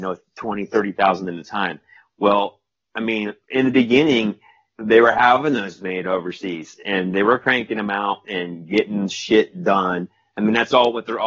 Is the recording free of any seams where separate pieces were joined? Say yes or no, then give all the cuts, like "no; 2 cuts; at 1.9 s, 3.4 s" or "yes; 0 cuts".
no; 1 cut; at 3.4 s